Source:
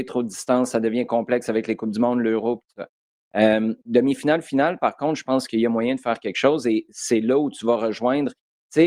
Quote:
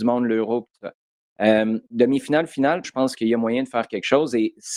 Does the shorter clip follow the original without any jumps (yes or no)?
no